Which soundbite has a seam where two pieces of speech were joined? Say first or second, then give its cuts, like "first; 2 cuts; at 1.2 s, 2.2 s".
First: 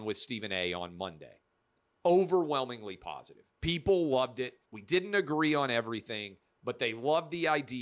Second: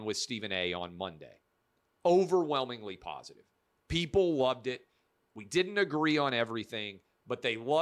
first; 2 cuts; at 3.5 s, 4.6 s